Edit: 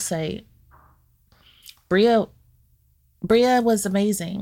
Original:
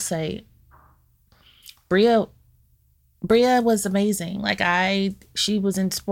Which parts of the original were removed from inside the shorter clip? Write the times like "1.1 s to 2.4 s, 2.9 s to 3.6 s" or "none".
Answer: none